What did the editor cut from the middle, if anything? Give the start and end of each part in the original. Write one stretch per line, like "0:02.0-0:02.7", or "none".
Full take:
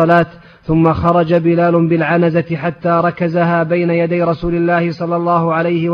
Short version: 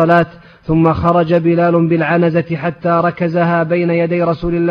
none